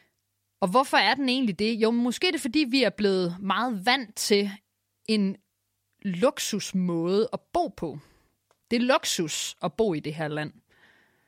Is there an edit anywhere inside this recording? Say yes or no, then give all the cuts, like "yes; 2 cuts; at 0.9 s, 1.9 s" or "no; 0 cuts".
no; 0 cuts